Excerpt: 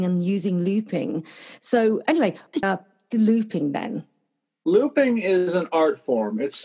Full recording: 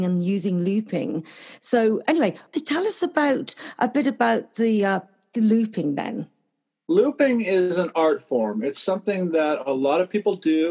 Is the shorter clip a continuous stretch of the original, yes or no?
no